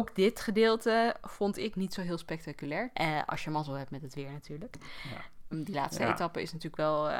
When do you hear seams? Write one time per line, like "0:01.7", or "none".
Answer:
0:02.9
0:05.5